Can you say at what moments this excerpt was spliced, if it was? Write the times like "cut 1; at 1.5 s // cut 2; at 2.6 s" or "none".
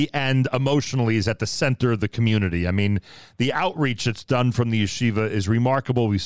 none